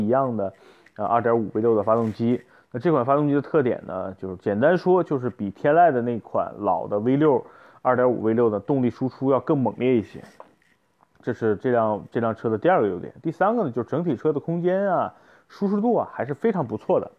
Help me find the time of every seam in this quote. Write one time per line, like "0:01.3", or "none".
none